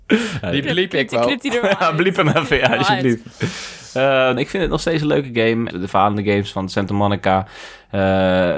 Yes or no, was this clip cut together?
yes